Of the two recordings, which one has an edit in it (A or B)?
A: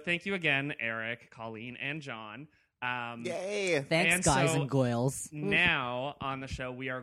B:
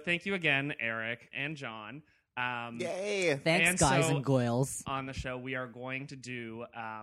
B